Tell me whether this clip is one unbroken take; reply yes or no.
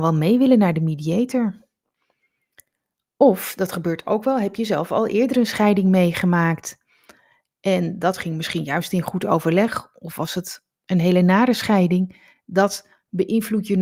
yes